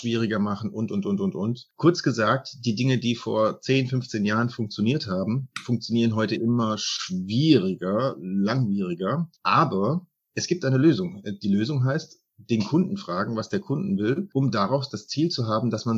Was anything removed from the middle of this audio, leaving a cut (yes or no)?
no